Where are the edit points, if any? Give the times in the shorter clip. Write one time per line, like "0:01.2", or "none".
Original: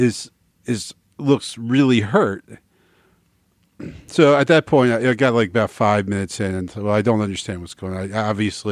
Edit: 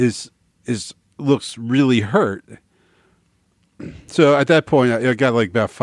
none